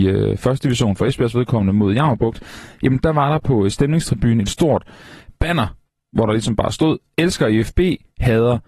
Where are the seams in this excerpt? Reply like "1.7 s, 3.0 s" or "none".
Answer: none